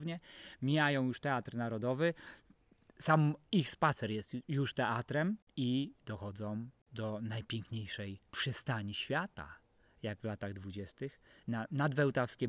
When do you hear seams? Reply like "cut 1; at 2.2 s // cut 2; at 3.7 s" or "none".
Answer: cut 1; at 8.3 s // cut 2; at 11.4 s